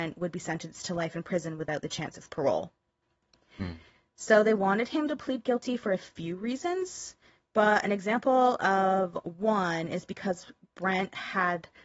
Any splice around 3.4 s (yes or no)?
no